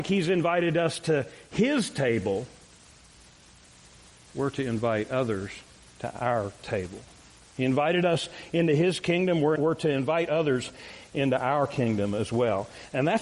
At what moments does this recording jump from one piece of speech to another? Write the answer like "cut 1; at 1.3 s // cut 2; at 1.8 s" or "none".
cut 1; at 9.6 s